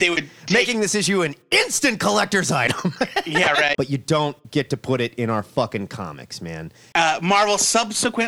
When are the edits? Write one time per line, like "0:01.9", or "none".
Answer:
0:03.7
0:06.9